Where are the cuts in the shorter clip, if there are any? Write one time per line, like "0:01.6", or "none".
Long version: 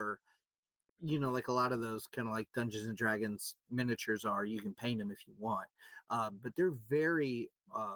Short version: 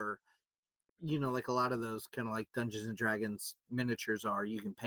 none